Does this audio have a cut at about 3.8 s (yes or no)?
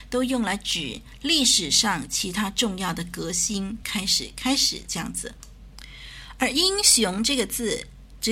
yes